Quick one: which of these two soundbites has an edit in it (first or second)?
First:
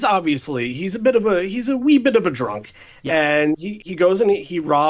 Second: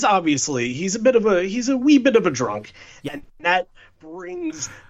second